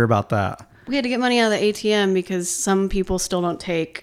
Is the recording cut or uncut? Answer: uncut